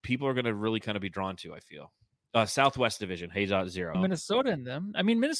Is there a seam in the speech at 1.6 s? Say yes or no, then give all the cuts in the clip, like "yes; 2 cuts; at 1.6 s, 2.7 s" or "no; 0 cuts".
no; 1 cut; at 3.9 s